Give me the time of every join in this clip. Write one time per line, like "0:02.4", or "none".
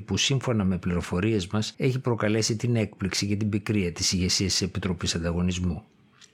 0:01.7